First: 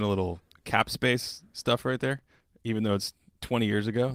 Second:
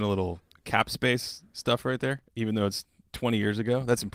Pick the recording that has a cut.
second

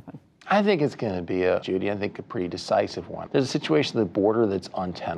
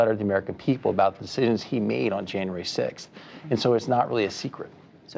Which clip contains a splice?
first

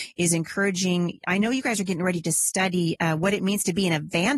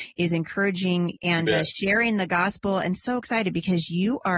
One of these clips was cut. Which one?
second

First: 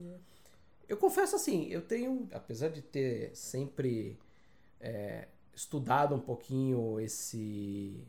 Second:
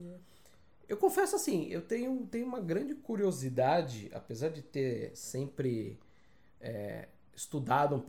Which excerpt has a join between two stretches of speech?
first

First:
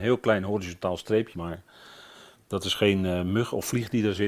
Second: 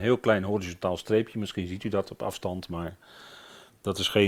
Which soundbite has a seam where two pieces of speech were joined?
first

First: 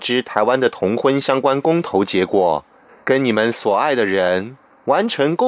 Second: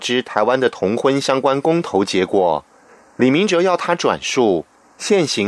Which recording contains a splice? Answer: first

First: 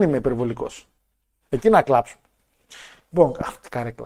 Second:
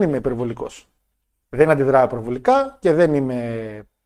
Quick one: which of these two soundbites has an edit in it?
first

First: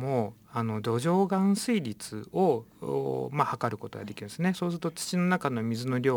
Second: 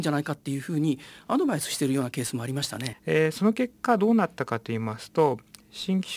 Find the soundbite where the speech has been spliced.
second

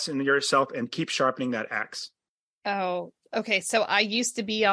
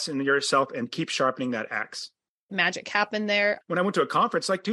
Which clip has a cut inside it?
second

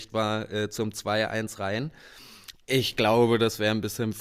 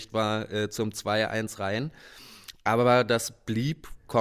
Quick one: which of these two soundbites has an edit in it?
first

